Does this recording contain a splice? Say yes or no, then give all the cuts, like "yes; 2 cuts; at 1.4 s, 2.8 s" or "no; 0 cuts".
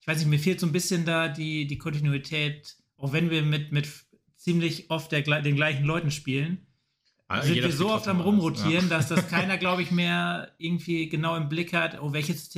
no; 0 cuts